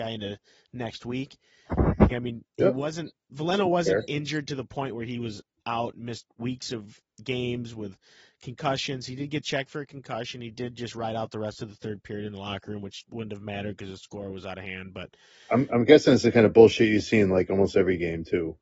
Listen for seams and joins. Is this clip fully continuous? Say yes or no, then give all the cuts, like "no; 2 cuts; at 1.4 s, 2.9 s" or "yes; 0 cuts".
no; 1 cut; at 2.1 s